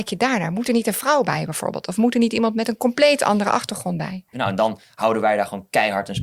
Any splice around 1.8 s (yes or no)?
no